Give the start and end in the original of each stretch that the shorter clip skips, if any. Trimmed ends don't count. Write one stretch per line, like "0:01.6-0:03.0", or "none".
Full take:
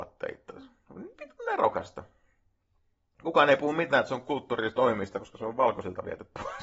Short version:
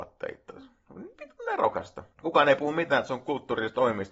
0:02.1-0:03.1